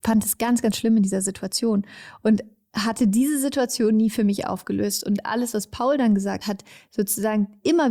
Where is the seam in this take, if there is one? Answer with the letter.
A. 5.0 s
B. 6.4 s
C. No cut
B